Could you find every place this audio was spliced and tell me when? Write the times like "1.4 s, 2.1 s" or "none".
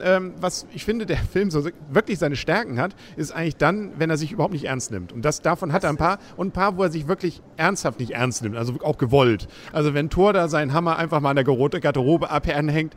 none